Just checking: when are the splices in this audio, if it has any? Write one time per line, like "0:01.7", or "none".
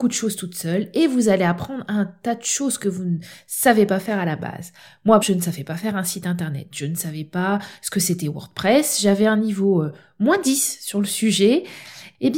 0:05.2